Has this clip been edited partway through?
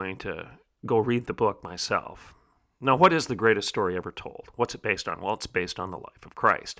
no; 0 cuts

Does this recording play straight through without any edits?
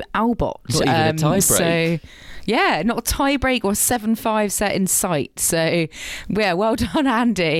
yes; 0 cuts

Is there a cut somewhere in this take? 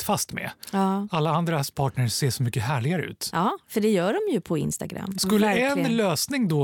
no; 0 cuts

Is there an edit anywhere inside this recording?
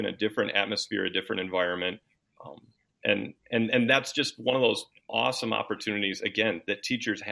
no; 0 cuts

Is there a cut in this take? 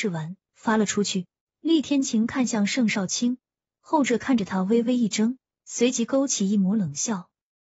yes; 1 cut; at 1.4 s

